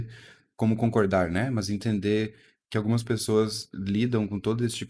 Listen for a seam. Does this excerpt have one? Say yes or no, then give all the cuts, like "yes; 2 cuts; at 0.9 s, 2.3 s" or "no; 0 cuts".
no; 0 cuts